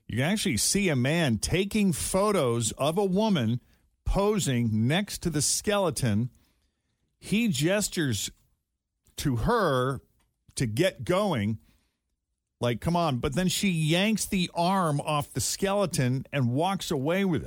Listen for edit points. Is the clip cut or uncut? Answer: cut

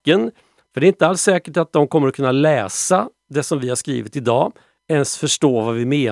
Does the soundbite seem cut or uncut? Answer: uncut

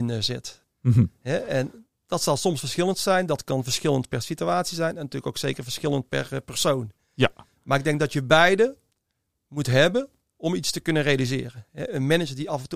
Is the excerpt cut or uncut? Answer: uncut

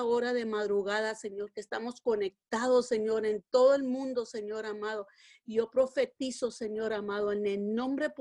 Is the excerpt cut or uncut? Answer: uncut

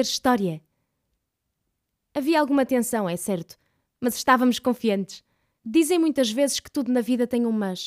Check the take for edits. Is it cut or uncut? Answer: cut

